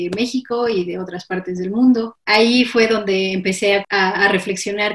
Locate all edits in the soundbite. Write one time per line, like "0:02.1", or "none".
0:02.2